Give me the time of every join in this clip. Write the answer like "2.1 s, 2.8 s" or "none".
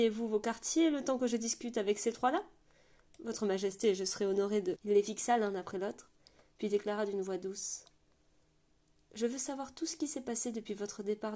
4.8 s